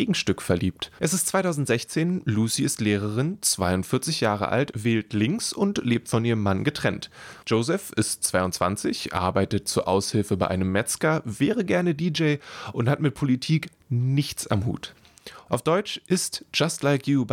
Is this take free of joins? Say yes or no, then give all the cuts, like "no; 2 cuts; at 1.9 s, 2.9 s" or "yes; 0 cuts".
no; 3 cuts; at 1.0 s, 7.4 s, 15.5 s